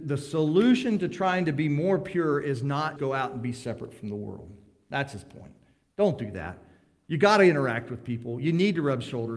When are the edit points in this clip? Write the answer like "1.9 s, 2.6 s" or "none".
3.0 s